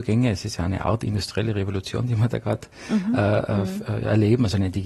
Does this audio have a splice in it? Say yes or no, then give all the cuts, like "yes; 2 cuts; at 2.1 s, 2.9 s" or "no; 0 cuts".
no; 0 cuts